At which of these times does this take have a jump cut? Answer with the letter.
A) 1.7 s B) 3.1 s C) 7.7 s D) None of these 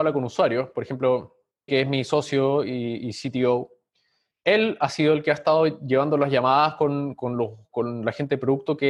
A